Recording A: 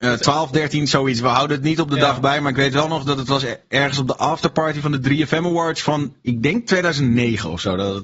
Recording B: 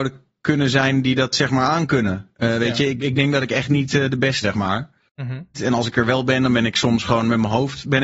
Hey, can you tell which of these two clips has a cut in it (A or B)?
B